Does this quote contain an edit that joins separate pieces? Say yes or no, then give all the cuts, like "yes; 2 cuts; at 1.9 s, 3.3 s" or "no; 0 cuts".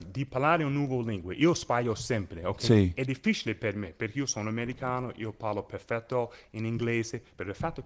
no; 0 cuts